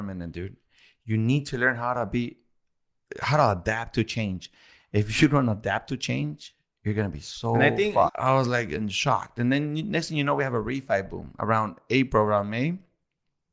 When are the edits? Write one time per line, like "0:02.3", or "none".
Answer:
0:08.1